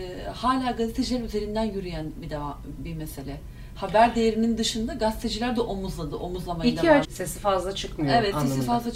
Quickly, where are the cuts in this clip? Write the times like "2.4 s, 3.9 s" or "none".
2.8 s, 7.0 s